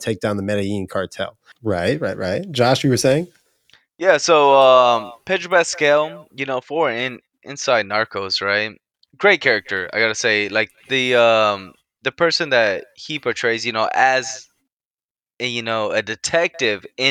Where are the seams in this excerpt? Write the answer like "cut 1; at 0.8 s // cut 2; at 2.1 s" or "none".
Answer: cut 1; at 1.5 s